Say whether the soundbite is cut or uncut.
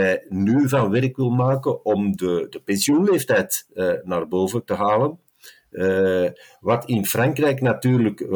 uncut